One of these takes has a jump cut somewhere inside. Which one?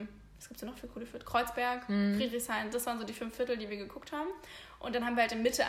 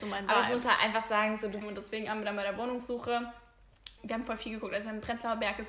second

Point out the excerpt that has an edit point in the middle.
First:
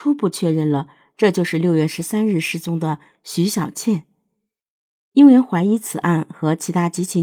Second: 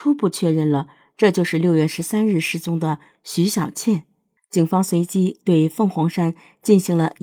second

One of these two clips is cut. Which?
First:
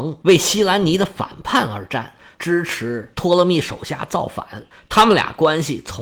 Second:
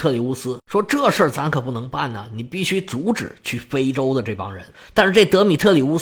first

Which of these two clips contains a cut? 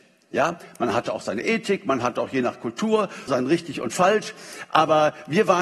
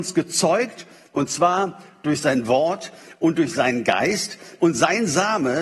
first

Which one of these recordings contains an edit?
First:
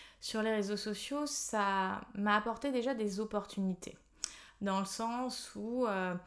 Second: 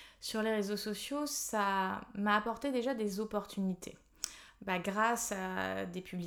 second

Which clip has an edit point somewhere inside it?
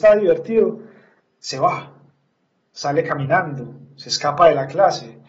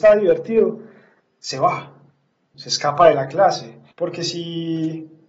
second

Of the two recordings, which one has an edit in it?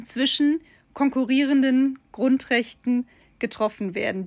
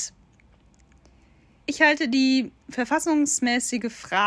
second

